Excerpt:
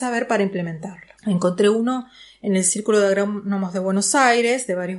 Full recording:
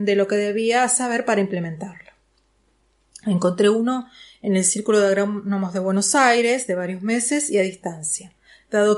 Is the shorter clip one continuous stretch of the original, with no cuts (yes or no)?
no